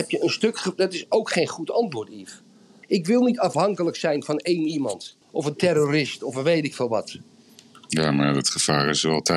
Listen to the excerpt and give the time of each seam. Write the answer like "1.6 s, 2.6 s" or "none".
2.8 s, 5.2 s